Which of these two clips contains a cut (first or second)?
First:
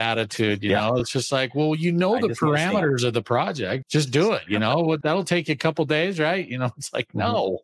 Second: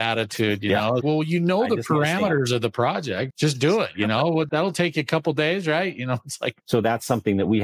second